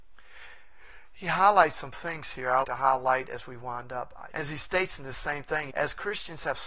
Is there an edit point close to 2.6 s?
yes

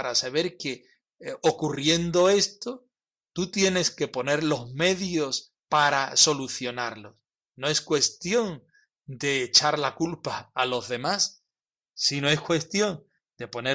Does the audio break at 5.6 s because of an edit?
yes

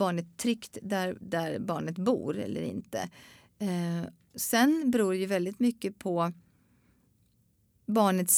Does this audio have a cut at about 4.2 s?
no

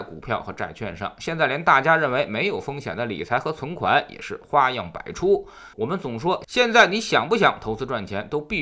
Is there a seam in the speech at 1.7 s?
no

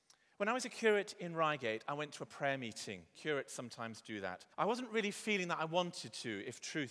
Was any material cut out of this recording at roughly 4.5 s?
yes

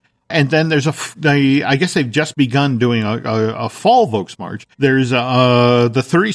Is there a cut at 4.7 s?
yes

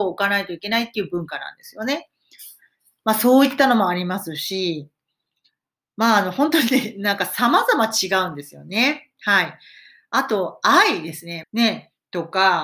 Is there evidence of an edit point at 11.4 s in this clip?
yes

